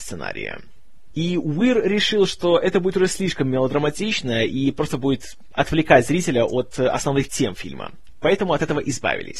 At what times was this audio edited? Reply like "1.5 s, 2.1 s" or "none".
1.1 s